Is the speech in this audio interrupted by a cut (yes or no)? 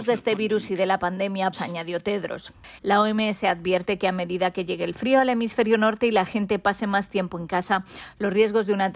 yes